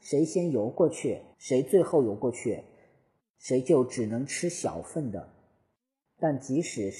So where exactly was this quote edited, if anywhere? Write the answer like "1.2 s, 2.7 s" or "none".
1.3 s